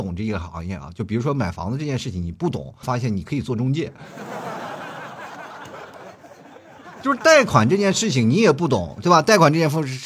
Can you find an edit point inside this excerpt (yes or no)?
yes